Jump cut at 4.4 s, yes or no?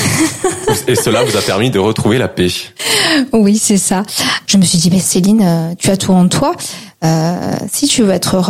yes